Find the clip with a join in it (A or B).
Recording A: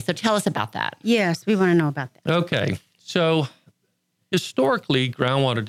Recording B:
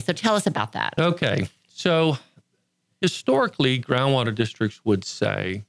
B